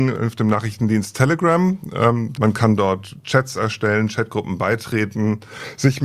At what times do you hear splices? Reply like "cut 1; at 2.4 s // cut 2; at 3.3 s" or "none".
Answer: cut 1; at 2.3 s